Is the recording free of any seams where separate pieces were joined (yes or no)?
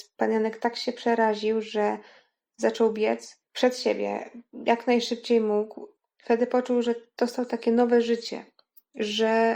yes